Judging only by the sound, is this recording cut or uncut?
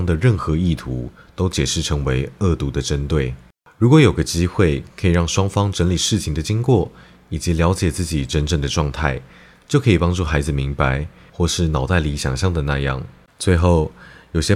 cut